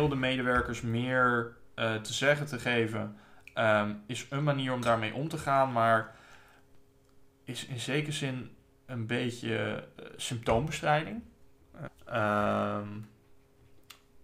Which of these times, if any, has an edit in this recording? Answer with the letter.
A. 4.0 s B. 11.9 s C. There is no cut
B